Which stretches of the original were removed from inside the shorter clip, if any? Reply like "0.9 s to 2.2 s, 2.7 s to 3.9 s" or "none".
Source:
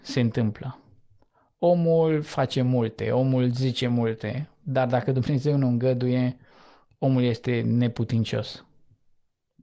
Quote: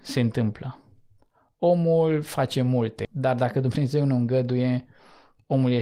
3.0 s to 4.6 s

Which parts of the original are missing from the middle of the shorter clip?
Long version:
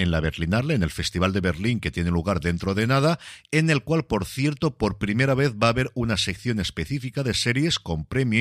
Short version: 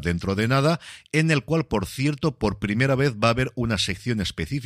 none

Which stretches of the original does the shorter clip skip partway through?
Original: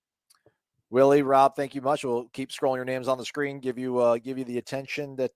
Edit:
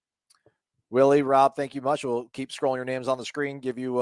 none

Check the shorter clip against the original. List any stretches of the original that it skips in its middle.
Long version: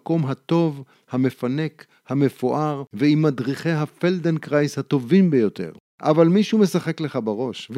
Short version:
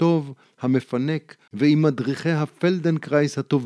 2.0 s to 2.9 s

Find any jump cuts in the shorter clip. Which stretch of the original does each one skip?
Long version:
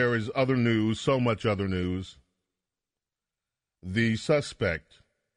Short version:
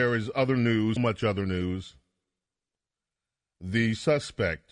1.0 s to 1.2 s

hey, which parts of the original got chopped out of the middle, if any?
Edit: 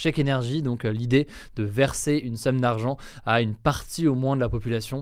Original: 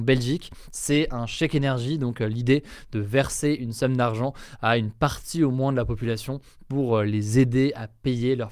none

